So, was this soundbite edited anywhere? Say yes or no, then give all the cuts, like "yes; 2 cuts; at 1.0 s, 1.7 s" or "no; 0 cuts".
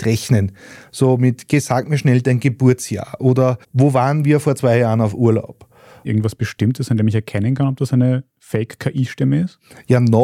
yes; 2 cuts; at 3.6 s, 6.0 s